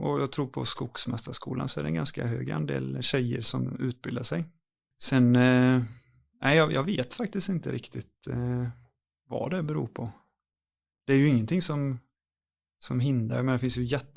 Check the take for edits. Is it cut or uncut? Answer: uncut